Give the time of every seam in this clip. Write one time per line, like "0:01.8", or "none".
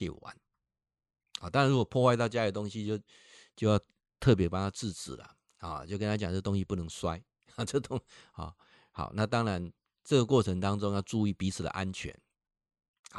none